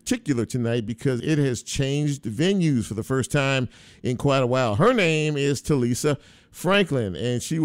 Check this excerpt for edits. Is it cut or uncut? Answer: cut